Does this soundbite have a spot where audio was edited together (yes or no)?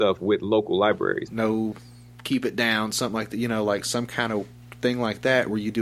yes